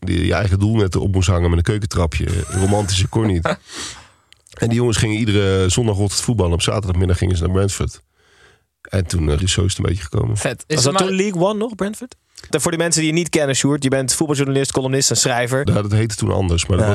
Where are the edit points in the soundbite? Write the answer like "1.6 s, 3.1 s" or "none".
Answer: 9.4 s, 12.5 s, 15.7 s